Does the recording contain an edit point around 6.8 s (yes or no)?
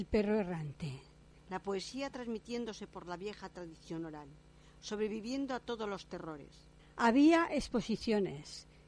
yes